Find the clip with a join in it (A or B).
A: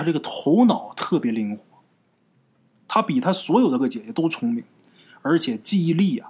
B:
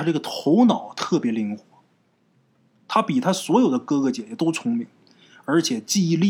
A